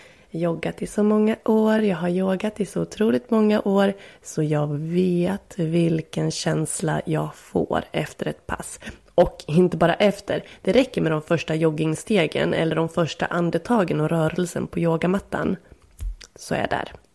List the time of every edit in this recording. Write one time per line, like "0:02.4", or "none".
none

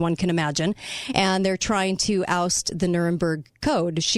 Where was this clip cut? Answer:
none

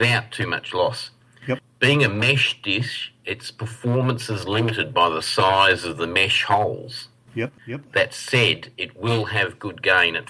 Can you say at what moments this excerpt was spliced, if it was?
0:07.6

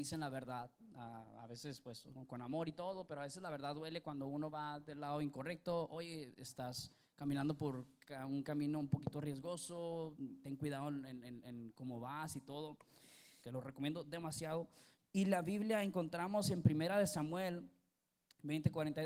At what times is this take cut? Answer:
0:13.4
0:15.0

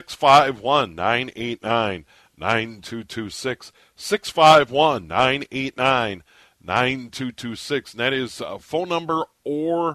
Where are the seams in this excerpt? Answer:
none

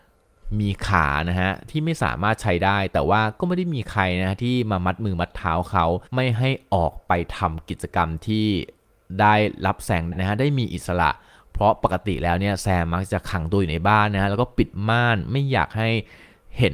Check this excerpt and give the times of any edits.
0:06.1
0:10.1

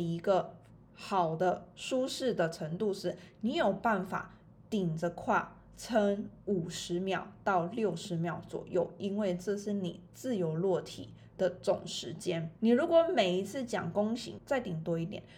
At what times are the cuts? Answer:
0:12.6
0:14.4

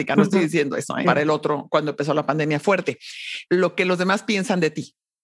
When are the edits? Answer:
0:01.0
0:03.4

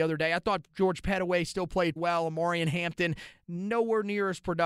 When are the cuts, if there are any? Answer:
0:02.0

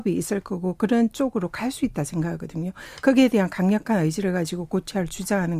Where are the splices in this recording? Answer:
none

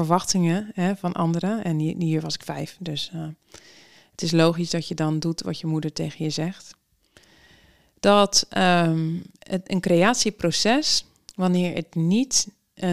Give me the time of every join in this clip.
none

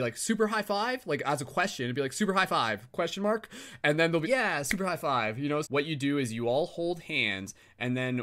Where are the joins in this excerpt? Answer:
0:04.2
0:05.6

